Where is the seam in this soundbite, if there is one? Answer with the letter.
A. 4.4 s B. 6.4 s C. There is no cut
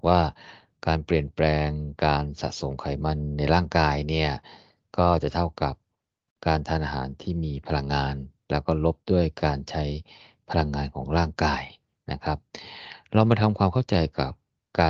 C